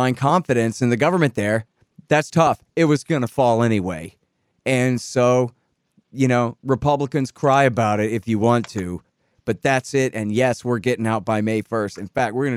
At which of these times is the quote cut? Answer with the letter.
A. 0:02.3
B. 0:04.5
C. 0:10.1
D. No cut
A